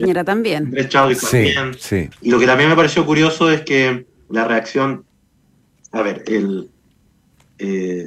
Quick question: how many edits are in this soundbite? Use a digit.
1